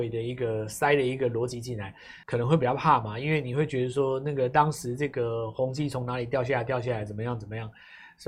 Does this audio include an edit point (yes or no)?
yes